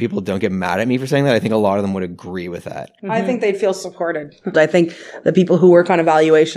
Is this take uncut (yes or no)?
no